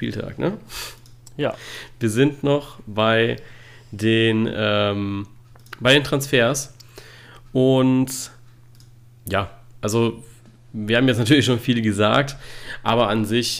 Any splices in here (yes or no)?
no